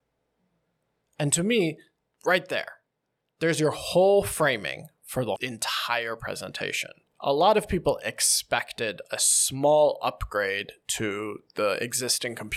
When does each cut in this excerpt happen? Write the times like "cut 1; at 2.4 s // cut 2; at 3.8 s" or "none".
none

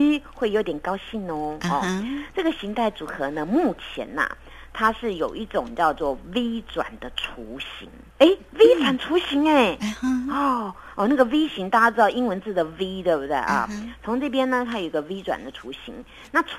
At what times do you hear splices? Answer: cut 1; at 8.1 s

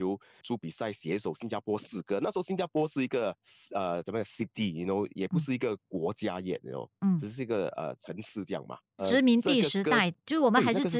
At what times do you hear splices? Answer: none

